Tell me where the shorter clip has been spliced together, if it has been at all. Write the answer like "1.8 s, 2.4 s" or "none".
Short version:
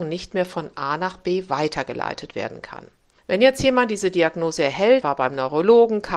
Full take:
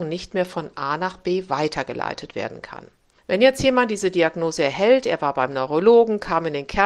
5.0 s

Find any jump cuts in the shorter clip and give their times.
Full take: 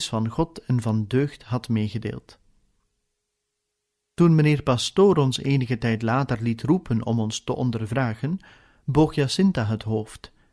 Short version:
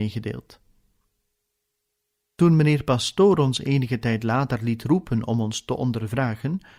none

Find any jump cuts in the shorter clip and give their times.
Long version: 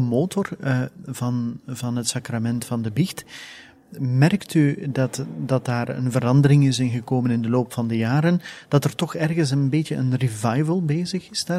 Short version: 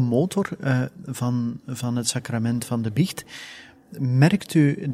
none

